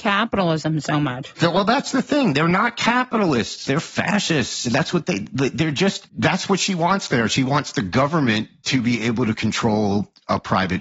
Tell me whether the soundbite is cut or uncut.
uncut